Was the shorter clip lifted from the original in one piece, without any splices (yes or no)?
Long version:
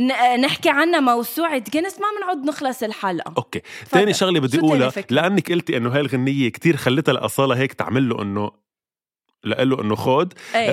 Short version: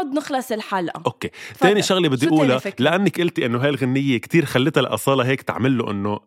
yes